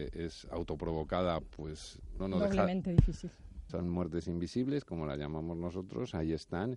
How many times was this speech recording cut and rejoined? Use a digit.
2